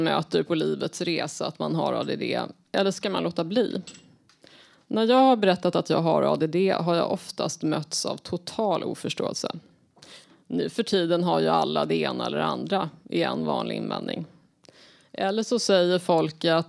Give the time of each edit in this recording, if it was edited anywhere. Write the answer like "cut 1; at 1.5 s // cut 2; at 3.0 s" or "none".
none